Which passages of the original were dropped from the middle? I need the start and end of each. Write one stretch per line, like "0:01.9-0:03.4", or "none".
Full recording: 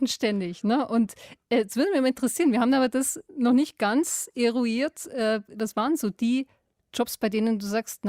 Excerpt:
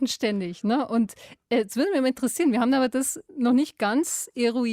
none